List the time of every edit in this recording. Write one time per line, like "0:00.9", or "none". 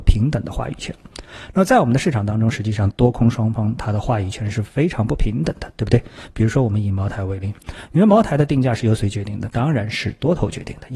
none